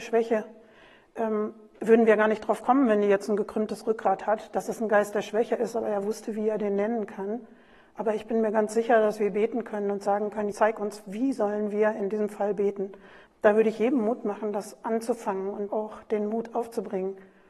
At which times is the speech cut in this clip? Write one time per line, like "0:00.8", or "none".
0:10.5
0:13.3
0:15.7